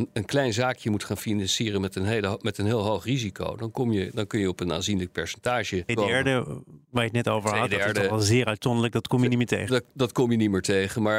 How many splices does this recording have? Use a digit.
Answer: 1